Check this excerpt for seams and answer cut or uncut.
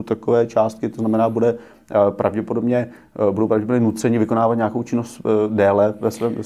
uncut